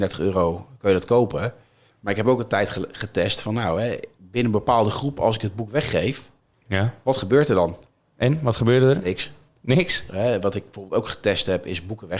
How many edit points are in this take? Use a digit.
1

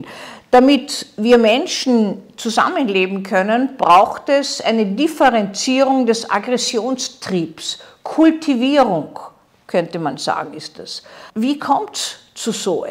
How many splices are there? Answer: 1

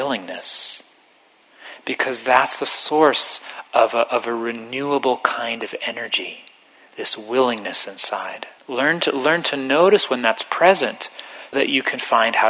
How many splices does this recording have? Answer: 2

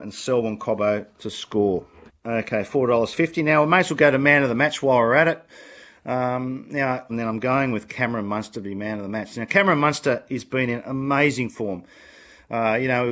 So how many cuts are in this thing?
2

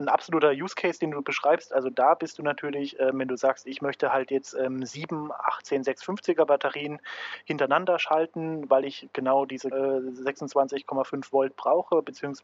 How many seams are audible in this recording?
1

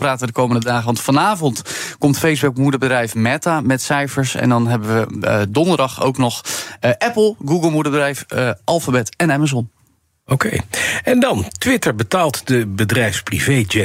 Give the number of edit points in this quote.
0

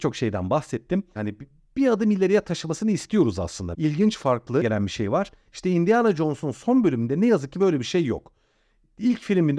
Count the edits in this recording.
2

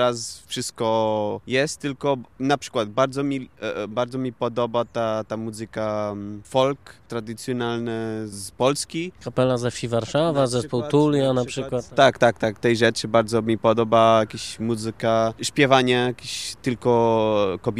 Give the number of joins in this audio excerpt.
0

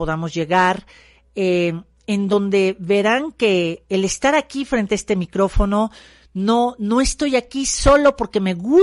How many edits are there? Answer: 0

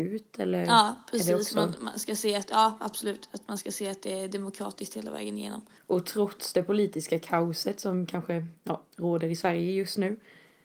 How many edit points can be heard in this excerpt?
1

